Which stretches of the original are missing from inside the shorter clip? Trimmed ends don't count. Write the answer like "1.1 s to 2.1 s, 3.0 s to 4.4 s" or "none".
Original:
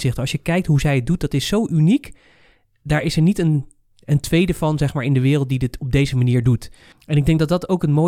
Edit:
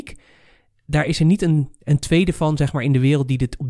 3.8 s to 4.0 s